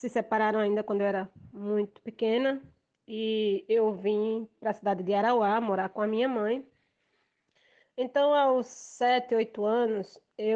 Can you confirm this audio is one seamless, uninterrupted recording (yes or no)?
no